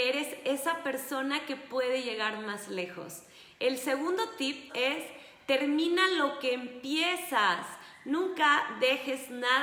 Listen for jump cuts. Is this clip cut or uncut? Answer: cut